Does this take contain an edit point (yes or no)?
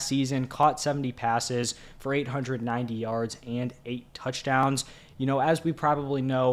no